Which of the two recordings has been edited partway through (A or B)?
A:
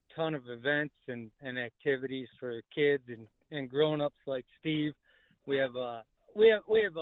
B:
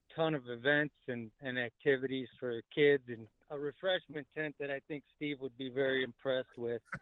B